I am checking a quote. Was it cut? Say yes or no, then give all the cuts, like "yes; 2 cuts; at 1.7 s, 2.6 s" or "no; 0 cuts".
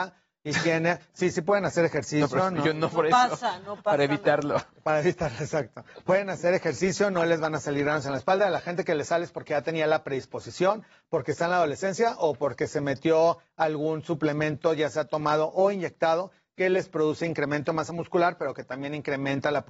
no; 0 cuts